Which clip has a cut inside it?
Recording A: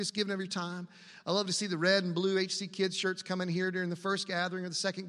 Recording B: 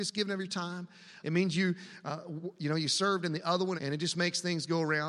B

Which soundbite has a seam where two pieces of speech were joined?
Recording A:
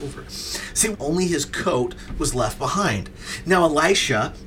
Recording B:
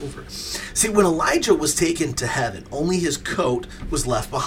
A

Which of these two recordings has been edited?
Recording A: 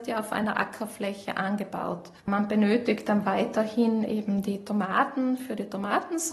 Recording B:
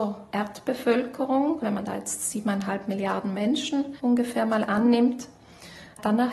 A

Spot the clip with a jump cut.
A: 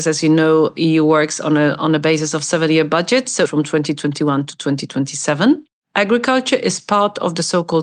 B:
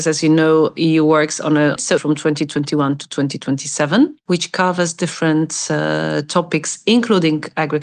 B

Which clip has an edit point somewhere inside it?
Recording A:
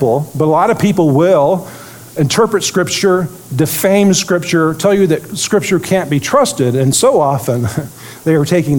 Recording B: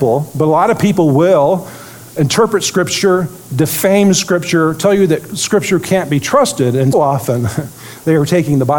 B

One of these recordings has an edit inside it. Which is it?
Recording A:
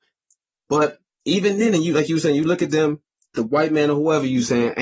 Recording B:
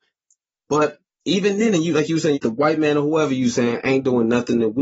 B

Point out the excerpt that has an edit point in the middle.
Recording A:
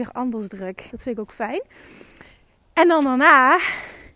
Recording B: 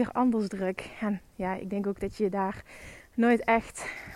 A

